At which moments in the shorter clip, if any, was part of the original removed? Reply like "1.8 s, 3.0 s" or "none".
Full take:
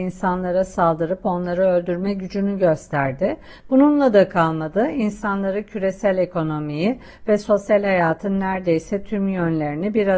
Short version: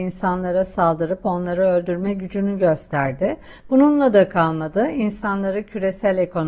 none